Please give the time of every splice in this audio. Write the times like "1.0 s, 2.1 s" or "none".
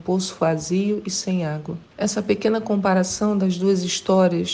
1.9 s